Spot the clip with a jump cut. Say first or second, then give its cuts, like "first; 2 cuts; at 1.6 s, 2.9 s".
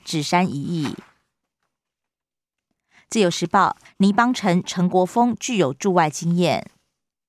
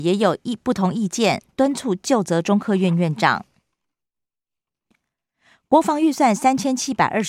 first; 1 cut; at 3.9 s